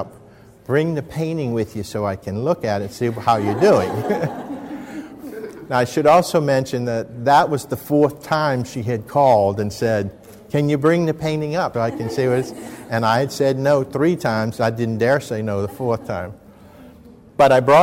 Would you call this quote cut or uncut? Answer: cut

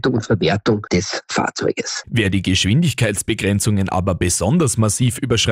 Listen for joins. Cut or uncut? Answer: cut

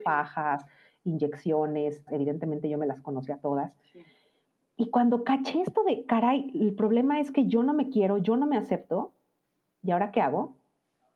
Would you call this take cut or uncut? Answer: cut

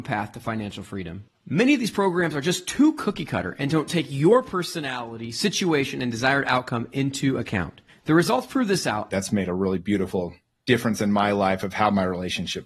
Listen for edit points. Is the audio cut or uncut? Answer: cut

